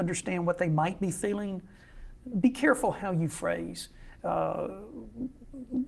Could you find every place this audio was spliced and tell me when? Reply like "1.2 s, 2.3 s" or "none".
2.3 s, 4.2 s